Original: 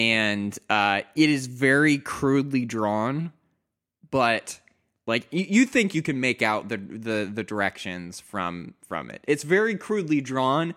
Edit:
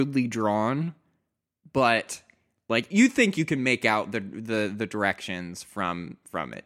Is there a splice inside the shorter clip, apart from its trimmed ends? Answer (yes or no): yes